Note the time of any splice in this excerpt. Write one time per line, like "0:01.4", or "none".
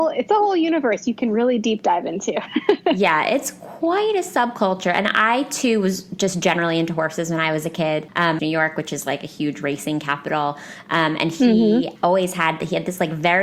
0:08.4